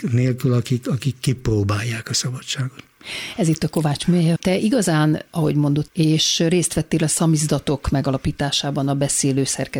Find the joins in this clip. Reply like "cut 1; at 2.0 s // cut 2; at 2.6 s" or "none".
cut 1; at 4.4 s // cut 2; at 5.9 s

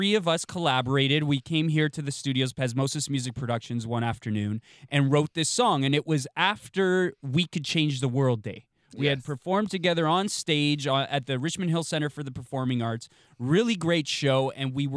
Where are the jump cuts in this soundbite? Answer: none

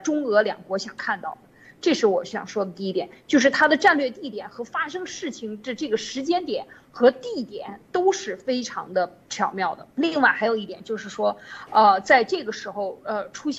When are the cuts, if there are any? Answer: cut 1; at 9.9 s

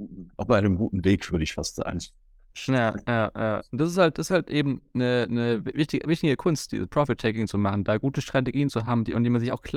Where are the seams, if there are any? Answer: cut 1; at 6.0 s

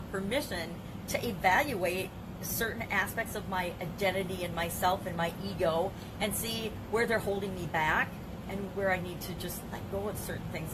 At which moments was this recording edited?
cut 1; at 8.7 s

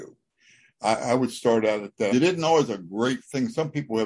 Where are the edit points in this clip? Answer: cut 1; at 2.1 s

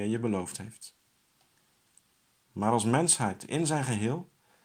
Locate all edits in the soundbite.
cut 1; at 2.4 s

